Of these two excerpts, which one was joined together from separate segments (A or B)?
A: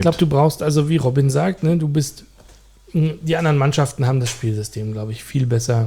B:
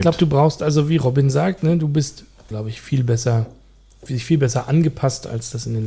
B